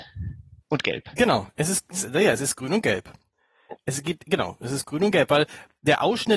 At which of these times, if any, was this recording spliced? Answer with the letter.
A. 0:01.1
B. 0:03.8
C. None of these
C